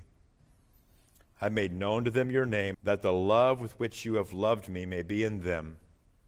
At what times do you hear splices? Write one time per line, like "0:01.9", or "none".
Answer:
0:01.2
0:02.7